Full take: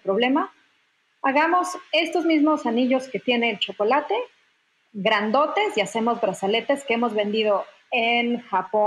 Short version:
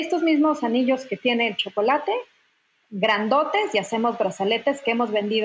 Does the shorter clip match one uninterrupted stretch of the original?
yes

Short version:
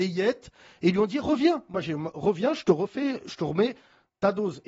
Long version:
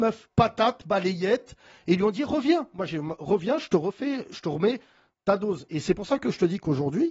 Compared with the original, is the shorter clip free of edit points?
yes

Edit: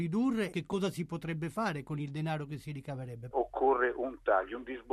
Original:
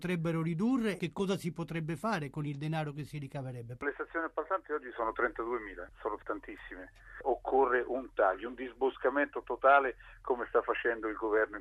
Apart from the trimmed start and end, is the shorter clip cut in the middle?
yes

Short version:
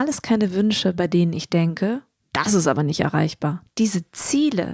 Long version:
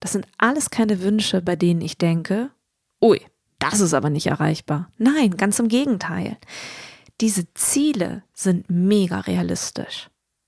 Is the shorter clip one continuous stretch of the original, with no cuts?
no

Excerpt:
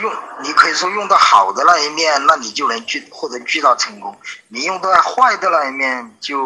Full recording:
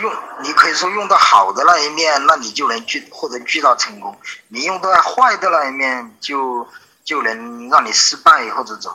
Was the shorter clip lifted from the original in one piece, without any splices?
yes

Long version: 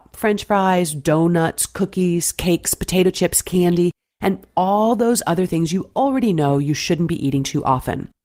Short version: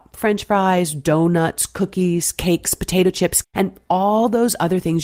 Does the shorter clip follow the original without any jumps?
no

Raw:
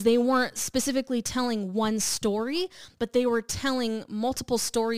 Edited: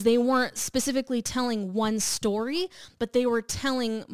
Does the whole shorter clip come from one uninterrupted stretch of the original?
yes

